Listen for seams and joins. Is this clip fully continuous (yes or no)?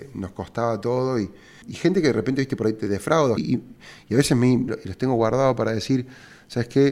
no